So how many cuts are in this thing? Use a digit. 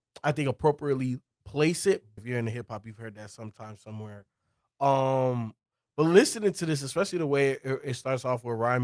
1